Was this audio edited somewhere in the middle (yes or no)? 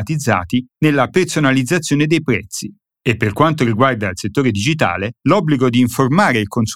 no